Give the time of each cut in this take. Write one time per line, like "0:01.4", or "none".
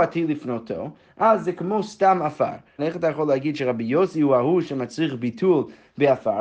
0:02.8